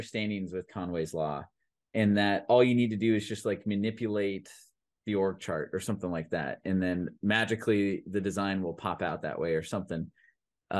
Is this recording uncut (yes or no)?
yes